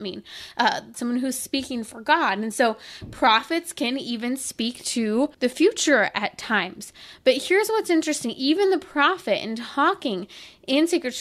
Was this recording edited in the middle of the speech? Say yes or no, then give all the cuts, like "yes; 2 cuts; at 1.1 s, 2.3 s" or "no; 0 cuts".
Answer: yes; 2 cuts; at 0.9 s, 5.3 s